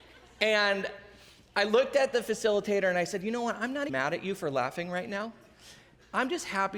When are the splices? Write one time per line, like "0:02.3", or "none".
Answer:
0:03.9